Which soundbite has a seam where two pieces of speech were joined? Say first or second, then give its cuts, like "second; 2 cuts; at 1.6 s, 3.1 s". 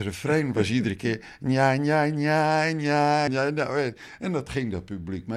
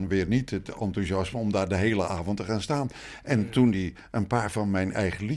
first; 1 cut; at 3.3 s